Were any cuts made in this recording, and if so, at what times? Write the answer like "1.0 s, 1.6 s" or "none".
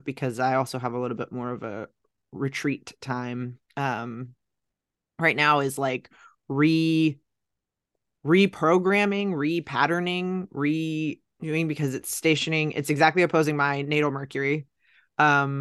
none